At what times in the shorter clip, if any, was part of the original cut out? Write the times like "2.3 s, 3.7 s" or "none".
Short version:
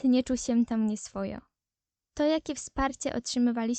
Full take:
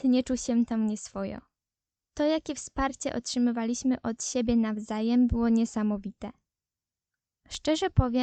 none